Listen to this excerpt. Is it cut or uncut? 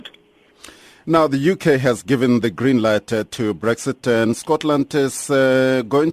uncut